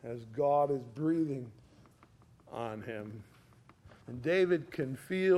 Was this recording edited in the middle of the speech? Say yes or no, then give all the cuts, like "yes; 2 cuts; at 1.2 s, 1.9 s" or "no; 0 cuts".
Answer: yes; 1 cut; at 4.0 s